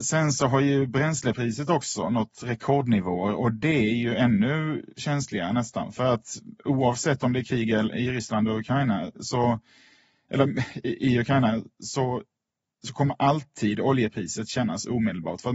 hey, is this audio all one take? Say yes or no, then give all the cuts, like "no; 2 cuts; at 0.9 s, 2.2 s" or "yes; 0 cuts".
yes; 0 cuts